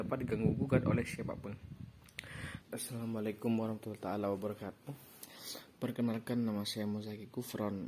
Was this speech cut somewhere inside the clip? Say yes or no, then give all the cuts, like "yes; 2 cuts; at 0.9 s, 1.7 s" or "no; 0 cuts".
yes; 1 cut; at 2.6 s